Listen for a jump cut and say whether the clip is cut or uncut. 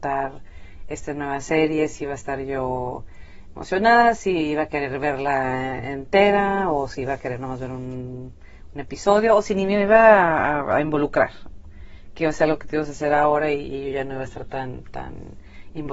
uncut